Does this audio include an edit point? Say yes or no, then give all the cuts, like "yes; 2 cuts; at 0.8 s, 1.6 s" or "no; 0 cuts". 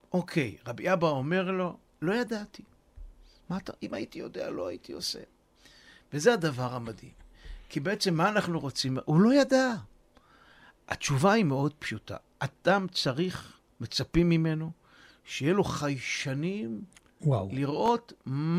no; 0 cuts